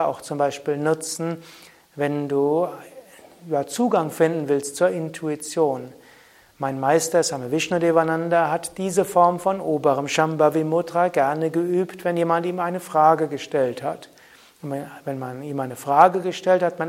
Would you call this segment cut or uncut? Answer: uncut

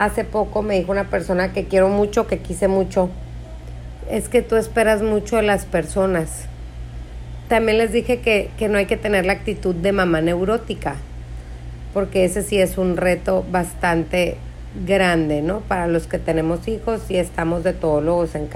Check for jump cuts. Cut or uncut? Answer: cut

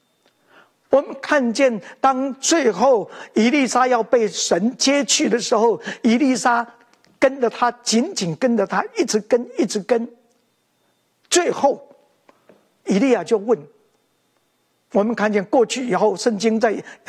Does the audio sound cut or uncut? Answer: uncut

